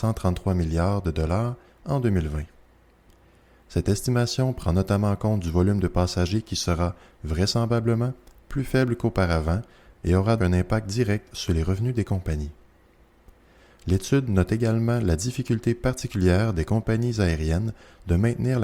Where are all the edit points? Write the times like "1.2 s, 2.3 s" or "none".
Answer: 10.4 s